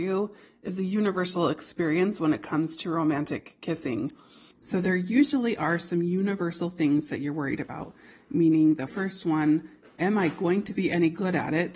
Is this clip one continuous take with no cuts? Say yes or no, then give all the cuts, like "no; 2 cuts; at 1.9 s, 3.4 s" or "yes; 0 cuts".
no; 2 cuts; at 4.5 s, 8.9 s